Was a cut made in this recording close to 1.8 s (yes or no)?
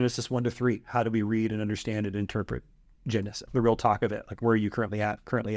no